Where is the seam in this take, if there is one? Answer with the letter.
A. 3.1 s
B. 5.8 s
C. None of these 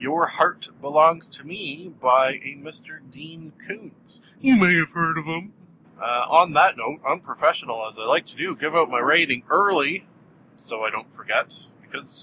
B